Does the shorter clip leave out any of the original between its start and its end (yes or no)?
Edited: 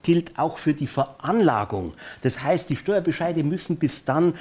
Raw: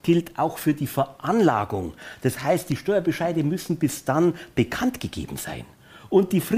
no